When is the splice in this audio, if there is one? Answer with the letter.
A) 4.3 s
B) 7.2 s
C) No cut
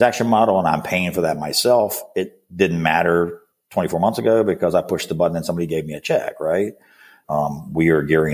B